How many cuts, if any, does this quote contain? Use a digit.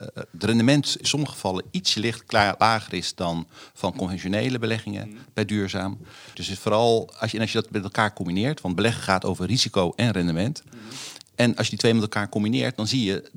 1